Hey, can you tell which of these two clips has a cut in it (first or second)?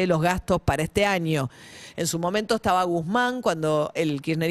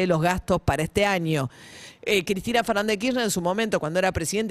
second